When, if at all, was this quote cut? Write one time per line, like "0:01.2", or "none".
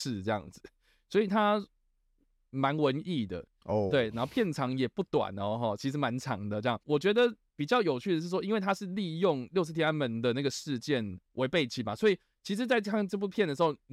none